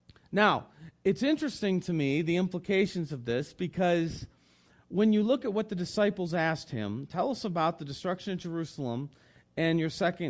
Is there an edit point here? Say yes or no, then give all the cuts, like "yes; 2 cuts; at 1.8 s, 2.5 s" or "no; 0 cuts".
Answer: no; 0 cuts